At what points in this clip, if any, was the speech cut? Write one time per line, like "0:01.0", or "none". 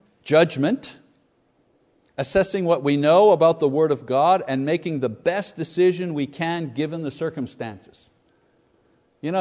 none

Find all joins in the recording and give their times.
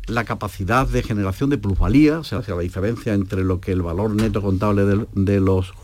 0:02.4

